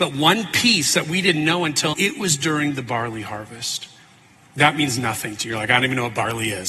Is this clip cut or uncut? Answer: cut